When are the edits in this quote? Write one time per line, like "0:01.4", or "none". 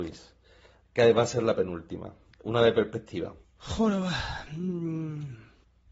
0:03.4